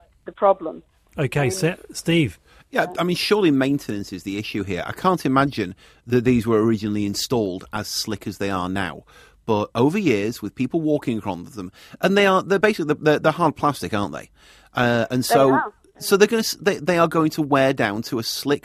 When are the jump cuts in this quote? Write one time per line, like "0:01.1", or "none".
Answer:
none